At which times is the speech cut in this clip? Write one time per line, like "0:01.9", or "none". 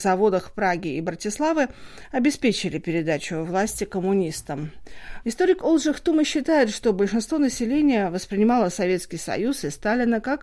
0:05.2